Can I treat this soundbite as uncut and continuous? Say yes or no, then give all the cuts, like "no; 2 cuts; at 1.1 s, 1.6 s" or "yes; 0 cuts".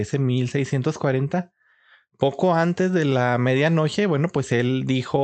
yes; 0 cuts